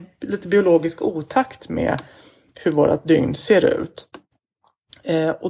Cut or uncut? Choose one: uncut